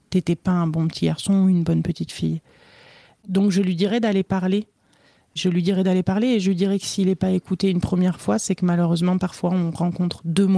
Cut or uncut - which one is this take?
uncut